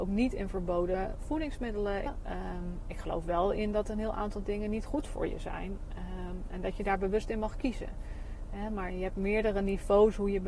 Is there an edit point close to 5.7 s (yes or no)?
no